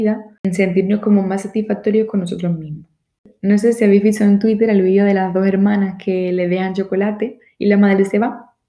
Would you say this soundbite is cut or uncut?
uncut